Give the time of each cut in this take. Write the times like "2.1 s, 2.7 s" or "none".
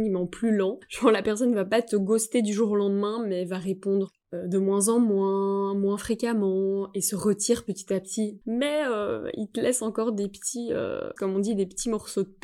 8.4 s, 11.2 s